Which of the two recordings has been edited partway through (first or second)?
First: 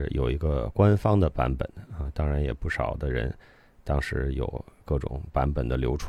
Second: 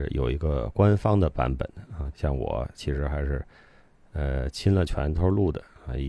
second